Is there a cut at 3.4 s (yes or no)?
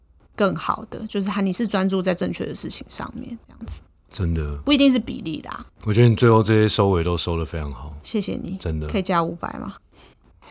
no